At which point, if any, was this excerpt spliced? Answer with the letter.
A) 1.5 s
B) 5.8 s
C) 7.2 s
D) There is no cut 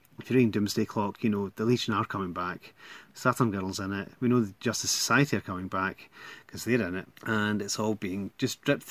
C